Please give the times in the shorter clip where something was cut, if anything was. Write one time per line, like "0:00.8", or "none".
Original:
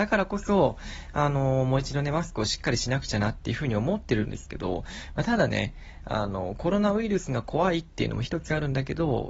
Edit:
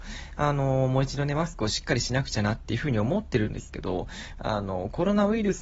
0:04.4